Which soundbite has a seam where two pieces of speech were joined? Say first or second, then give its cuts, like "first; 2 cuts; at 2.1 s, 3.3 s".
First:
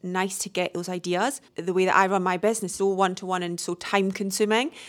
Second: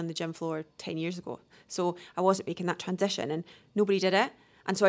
first; 2 cuts; at 1.5 s, 2.8 s